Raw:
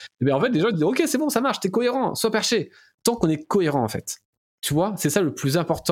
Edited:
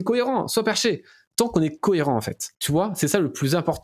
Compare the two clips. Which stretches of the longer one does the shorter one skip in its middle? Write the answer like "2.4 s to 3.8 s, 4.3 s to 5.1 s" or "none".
4.2 s to 4.6 s